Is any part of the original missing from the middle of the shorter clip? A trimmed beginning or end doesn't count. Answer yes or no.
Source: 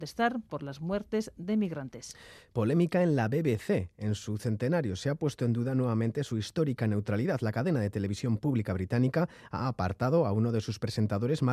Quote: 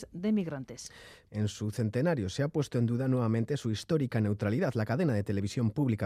yes